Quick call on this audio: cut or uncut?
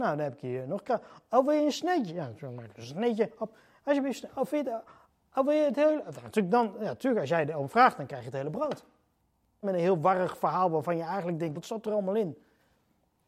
cut